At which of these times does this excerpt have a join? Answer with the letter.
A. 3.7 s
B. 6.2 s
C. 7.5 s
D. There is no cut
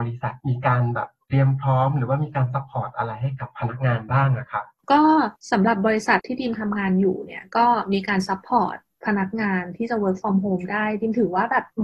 B